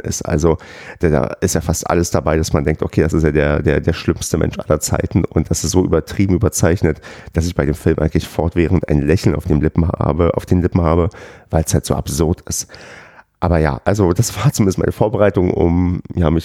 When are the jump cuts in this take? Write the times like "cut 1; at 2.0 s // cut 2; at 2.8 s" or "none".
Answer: none